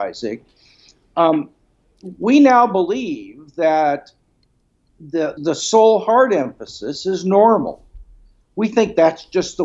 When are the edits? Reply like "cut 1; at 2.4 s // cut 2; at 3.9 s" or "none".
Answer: cut 1; at 5.4 s